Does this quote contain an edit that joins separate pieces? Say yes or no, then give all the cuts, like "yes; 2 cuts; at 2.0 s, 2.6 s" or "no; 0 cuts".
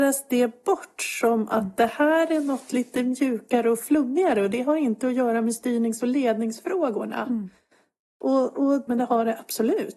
yes; 1 cut; at 8.9 s